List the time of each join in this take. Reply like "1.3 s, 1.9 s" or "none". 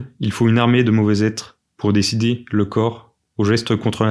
none